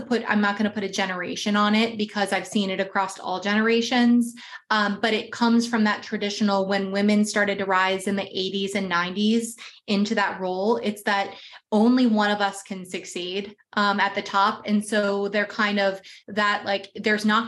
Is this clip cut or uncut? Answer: uncut